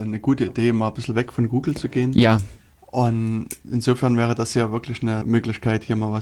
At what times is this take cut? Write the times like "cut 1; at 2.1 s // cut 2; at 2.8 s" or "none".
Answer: cut 1; at 5.2 s